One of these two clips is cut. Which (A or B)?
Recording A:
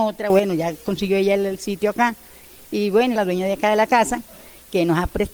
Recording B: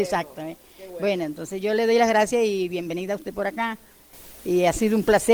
A